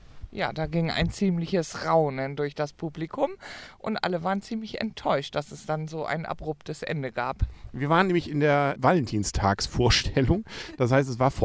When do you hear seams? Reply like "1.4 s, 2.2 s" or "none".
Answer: 8.7 s